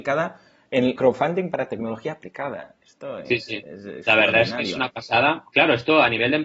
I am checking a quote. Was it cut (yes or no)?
yes